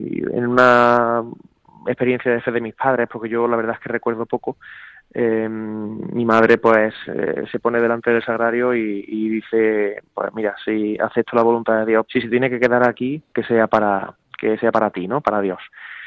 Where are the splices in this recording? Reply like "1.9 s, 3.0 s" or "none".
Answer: 12.1 s, 13.3 s